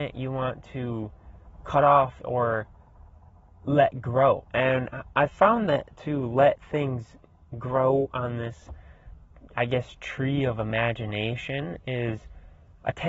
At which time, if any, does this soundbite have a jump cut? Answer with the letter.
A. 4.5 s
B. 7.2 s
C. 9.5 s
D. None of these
A